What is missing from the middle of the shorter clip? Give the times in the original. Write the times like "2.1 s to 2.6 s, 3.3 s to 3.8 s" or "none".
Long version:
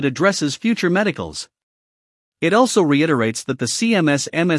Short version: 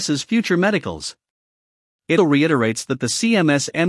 2.5 s to 2.8 s